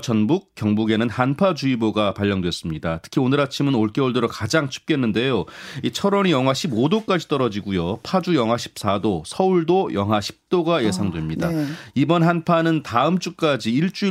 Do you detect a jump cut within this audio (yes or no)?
no